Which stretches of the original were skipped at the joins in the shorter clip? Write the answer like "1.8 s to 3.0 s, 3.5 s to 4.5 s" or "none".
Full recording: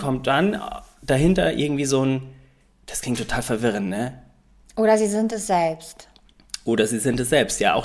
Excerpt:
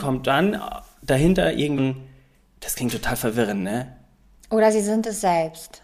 1.8 s to 2.0 s